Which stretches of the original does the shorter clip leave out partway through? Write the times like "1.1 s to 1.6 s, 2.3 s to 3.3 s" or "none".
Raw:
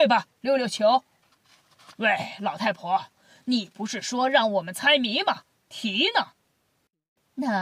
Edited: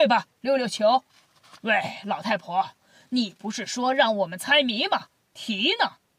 1.1 s to 1.4 s